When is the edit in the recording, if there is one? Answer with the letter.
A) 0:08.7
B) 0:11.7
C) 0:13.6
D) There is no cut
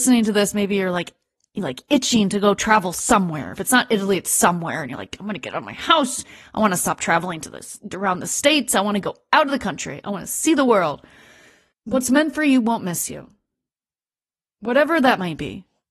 B